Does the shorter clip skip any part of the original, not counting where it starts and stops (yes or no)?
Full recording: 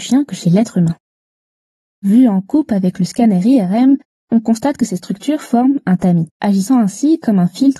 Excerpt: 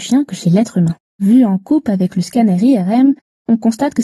yes